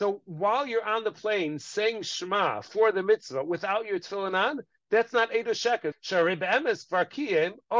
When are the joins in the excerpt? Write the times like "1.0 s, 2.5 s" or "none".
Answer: 5.9 s